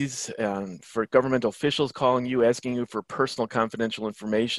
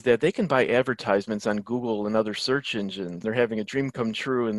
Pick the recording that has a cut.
second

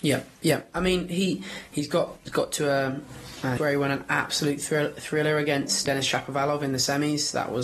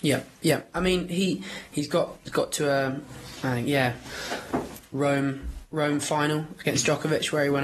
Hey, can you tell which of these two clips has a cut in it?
first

